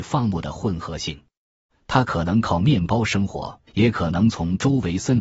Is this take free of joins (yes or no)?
no